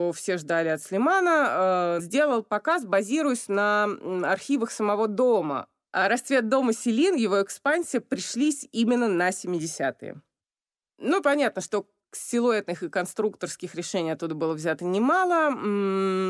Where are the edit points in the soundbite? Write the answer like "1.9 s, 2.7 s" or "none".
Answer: 2.0 s